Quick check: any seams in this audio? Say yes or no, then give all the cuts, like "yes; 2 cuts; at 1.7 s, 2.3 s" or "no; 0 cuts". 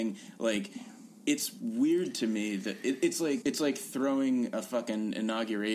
yes; 1 cut; at 3.4 s